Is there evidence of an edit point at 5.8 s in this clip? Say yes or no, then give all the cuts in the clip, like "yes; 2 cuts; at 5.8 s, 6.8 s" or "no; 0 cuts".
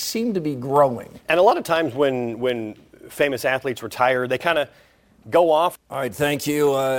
yes; 1 cut; at 5.8 s